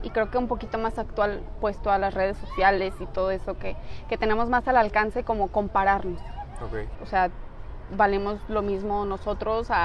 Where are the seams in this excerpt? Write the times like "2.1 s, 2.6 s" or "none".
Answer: 7.0 s